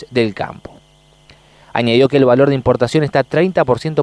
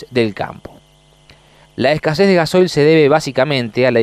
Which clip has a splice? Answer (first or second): second